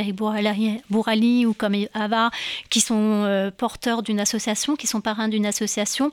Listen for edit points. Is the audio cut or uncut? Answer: uncut